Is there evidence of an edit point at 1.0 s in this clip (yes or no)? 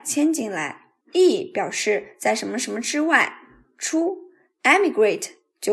yes